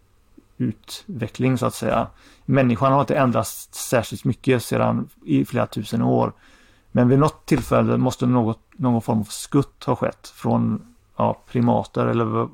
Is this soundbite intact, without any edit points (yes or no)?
yes